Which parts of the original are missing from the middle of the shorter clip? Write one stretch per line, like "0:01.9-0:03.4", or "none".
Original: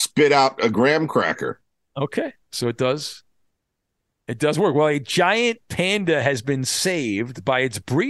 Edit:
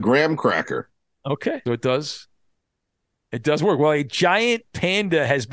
0:02.4-0:02.6